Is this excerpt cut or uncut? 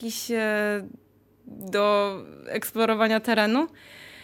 uncut